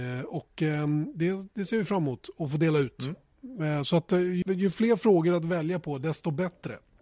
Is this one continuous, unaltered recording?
no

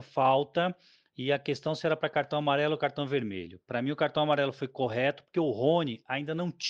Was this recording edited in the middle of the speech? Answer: no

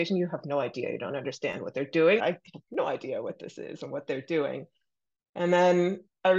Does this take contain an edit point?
yes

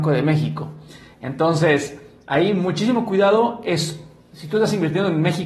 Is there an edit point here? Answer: no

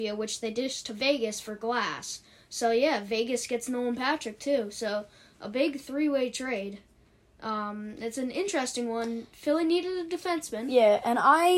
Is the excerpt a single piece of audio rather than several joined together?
yes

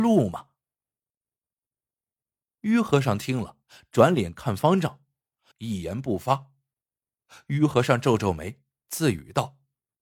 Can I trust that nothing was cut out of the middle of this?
no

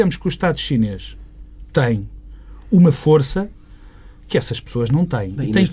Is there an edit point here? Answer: no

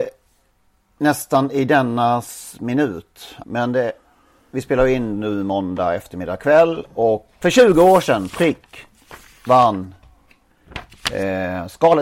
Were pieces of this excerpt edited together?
yes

